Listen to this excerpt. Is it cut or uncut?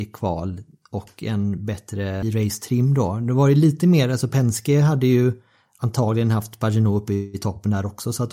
cut